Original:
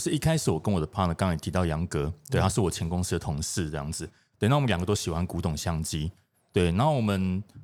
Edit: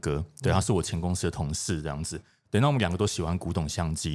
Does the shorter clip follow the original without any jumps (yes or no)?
yes